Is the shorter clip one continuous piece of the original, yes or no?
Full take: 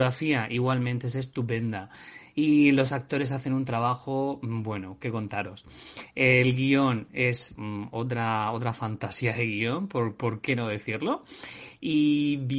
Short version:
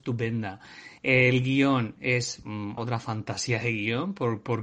no